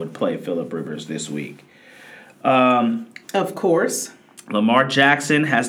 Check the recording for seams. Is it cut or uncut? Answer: cut